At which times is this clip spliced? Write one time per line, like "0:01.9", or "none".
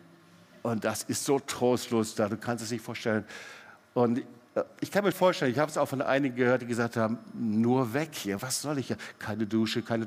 0:05.1
0:08.4

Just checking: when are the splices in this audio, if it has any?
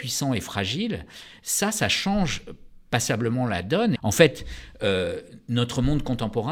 0:04.0

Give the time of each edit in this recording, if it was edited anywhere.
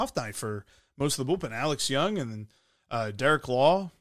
none

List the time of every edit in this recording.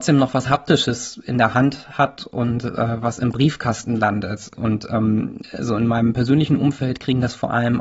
0:04.5

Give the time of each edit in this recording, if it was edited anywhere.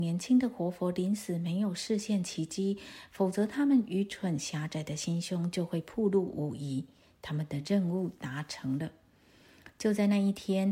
none

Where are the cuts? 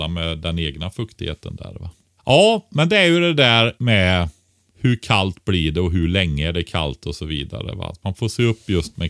0:02.2
0:03.8

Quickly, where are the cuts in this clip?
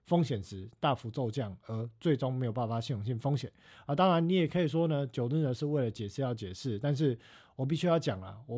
none

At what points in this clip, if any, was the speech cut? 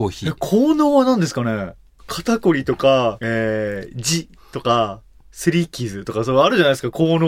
0:03.2

